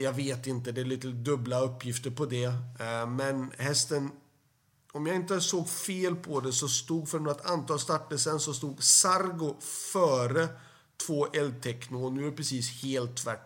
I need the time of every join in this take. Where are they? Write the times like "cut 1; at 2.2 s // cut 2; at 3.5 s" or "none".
none